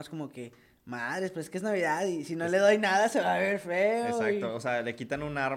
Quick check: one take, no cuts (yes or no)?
yes